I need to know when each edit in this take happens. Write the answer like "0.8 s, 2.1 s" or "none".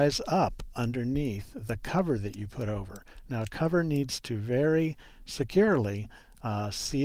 none